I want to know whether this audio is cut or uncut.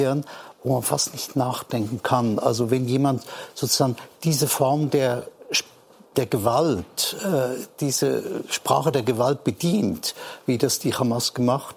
uncut